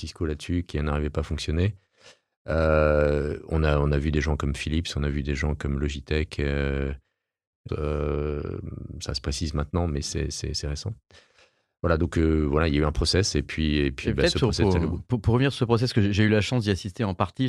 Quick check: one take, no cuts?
no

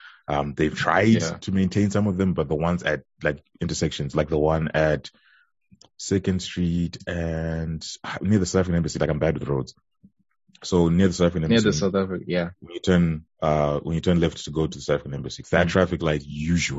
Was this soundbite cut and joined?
yes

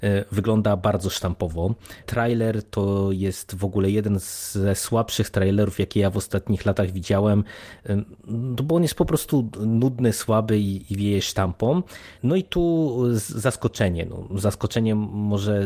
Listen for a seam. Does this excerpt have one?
no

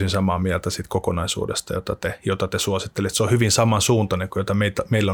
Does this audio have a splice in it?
no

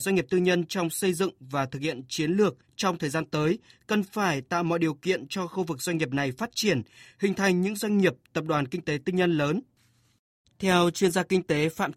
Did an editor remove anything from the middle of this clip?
yes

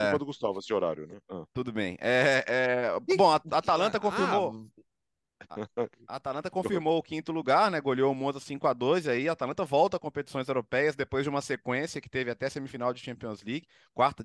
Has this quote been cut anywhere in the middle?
no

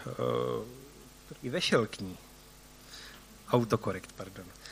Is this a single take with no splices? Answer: no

